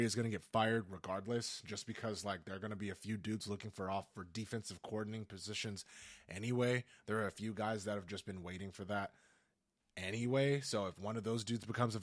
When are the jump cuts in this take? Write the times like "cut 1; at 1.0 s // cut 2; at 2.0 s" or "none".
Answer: none